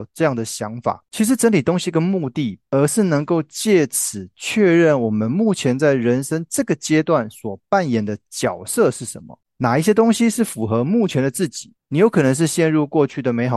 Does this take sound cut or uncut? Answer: cut